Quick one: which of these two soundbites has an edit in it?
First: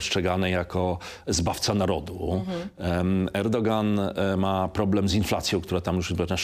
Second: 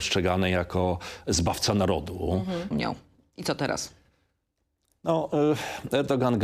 second; 1 cut; at 2.7 s

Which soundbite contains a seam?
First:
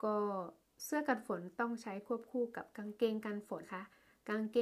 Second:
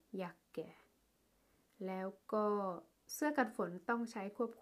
first; 1 cut; at 3.6 s

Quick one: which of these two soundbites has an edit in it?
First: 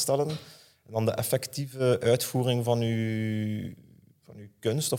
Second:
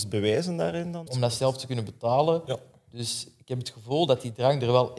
second; 1 cut; at 1.1 s

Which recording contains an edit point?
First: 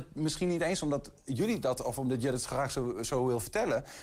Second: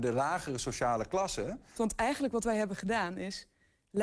second; 1 cut; at 1.8 s

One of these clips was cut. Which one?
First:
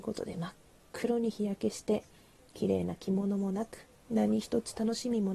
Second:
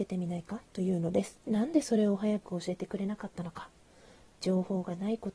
second; 1 cut; at 1.4 s

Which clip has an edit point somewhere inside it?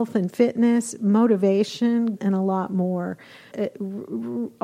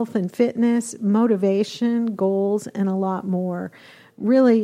first; 2 cuts; at 2.2 s, 3.5 s

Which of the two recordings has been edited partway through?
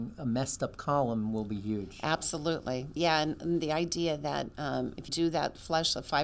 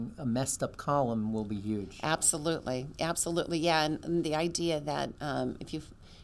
first; 2 cuts; at 3.0 s, 5.1 s

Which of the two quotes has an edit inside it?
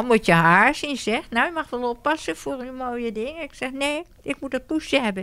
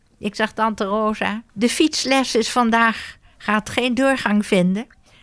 second; 1 cut; at 1.5 s

